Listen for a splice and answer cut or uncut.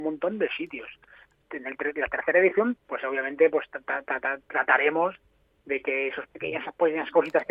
uncut